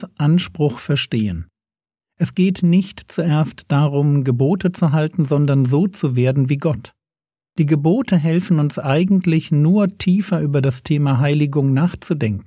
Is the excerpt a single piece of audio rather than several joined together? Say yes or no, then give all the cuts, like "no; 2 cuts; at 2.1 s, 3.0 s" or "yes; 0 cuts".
yes; 0 cuts